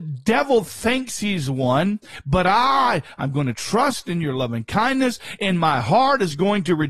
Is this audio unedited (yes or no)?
yes